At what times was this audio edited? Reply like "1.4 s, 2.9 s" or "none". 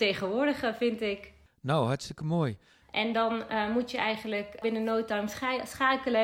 2.8 s